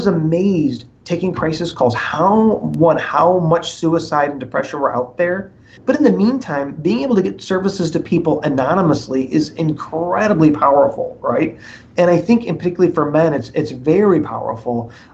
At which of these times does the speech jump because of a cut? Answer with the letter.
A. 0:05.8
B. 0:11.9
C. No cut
A